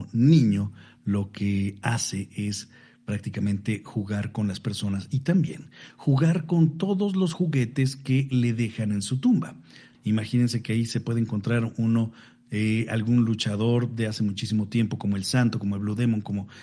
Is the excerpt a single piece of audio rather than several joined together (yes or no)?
no